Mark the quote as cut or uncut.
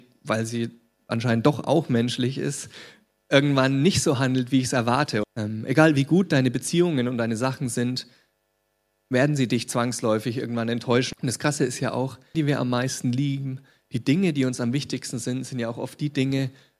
cut